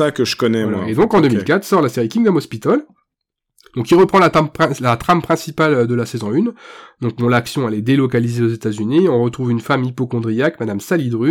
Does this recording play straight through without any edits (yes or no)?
yes